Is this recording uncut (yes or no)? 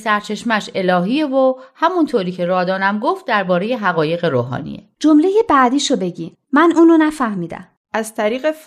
yes